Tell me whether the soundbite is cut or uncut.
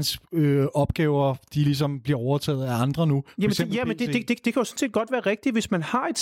uncut